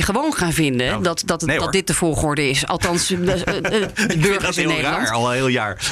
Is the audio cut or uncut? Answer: uncut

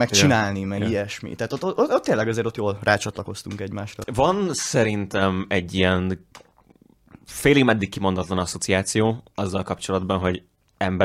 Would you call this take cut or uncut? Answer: uncut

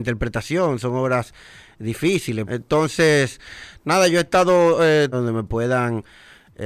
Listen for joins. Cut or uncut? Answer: cut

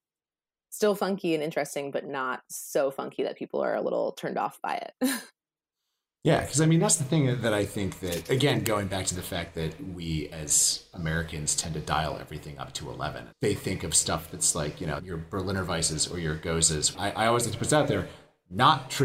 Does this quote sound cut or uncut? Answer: cut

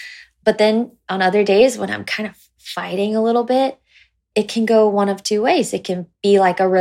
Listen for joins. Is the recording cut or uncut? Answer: uncut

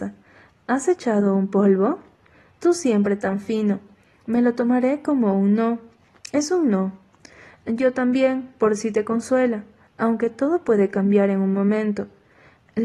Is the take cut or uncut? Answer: uncut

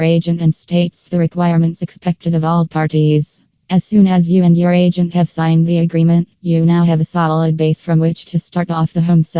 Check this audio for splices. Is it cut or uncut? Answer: uncut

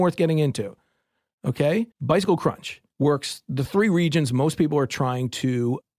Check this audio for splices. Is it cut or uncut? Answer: cut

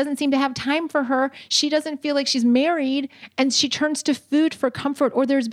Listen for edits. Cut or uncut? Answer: uncut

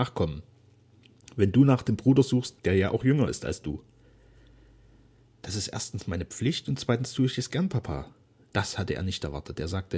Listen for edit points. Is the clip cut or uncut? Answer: cut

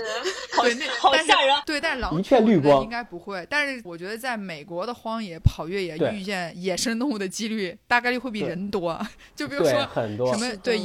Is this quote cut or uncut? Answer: cut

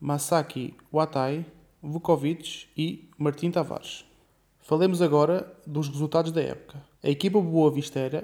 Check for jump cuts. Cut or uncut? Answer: cut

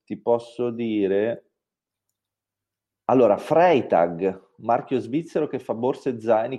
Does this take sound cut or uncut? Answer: uncut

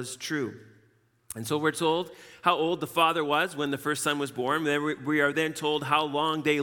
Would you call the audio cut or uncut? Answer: uncut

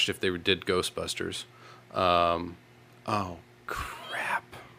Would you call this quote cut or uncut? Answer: uncut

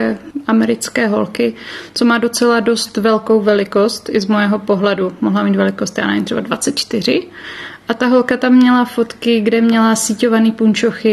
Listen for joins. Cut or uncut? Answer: uncut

